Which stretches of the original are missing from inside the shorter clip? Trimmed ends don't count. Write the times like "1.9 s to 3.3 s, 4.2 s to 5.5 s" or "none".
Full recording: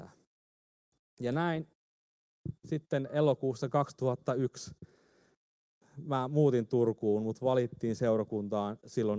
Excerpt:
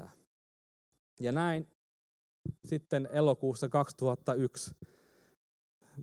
none